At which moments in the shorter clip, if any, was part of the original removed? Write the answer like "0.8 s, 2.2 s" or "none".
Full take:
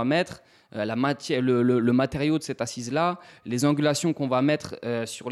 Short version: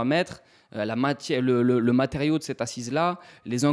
none